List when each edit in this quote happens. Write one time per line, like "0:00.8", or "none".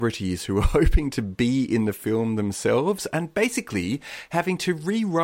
none